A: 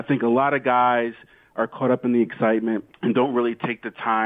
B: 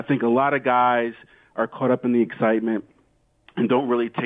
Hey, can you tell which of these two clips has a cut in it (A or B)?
A